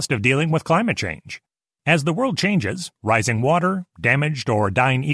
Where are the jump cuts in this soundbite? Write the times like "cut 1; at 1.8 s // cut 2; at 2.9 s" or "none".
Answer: cut 1; at 1.8 s // cut 2; at 2.9 s